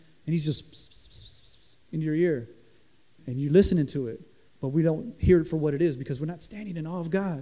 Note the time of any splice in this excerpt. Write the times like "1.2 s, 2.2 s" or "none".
3.2 s